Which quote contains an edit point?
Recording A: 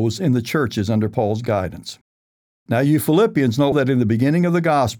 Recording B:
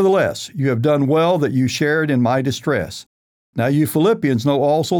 A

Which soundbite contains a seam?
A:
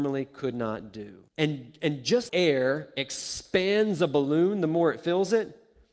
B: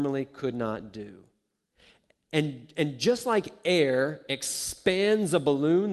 A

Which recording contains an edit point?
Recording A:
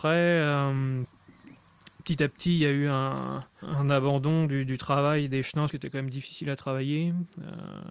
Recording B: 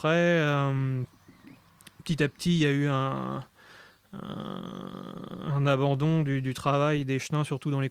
A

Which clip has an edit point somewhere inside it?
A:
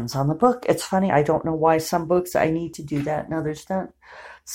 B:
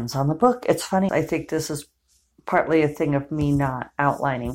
B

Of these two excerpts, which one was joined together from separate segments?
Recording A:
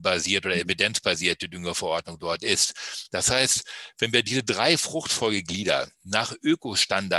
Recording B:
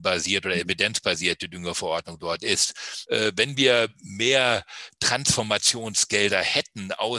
B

